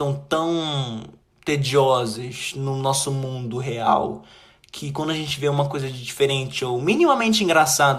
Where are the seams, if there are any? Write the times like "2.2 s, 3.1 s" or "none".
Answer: none